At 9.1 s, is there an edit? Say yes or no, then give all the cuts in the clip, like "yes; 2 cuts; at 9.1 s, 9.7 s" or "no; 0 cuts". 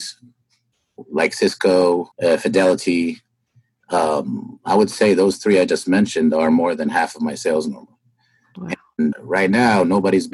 yes; 2 cuts; at 2.1 s, 9.1 s